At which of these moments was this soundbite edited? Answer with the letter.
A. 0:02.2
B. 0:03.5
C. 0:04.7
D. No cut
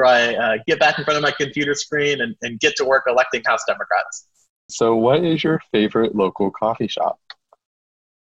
C